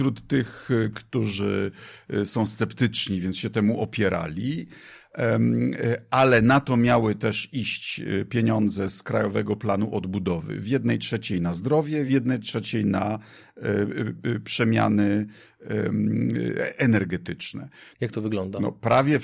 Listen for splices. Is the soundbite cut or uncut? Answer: cut